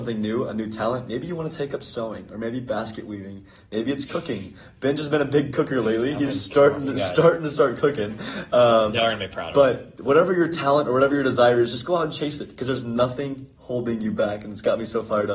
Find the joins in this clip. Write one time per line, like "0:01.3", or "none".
none